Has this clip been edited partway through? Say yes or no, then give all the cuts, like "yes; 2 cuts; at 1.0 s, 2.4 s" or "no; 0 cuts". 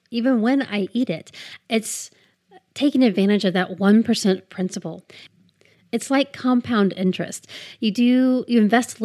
yes; 1 cut; at 1.6 s